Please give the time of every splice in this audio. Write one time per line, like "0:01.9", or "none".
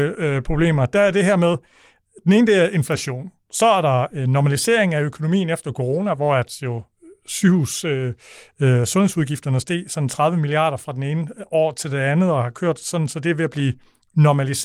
none